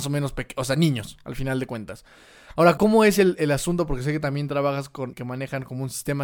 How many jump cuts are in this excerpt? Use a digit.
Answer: 2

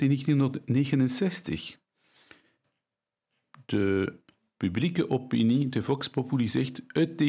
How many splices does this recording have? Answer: 0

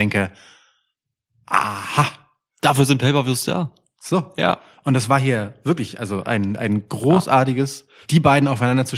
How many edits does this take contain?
1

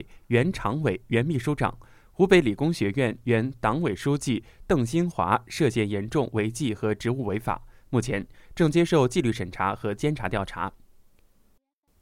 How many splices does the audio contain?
0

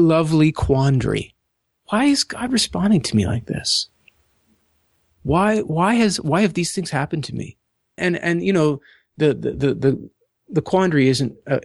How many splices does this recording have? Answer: 1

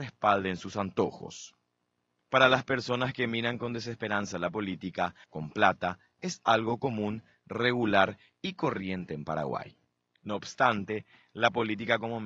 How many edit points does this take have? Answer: 1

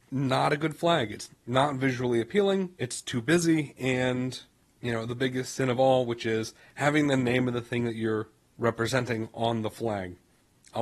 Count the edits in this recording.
2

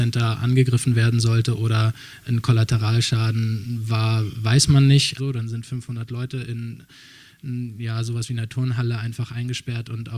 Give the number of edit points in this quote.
1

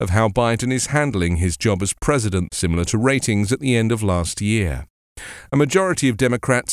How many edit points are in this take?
1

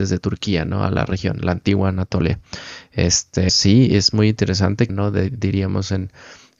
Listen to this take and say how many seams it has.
2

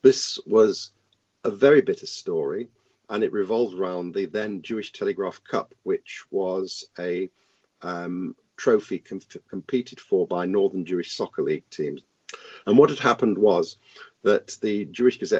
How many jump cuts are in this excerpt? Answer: 0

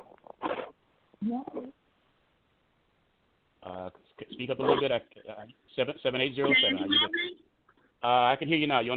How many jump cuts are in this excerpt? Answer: 0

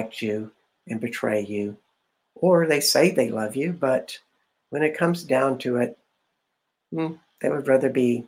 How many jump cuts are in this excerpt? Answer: 0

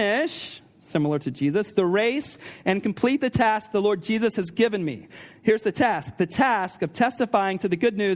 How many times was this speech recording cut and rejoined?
0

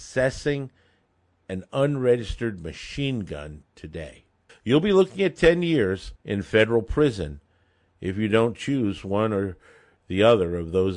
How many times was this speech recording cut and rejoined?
2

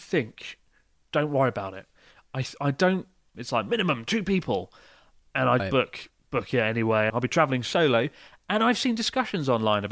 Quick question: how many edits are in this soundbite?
3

